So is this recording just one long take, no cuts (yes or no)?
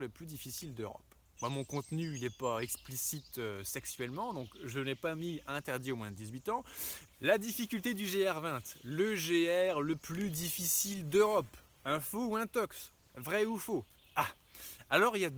no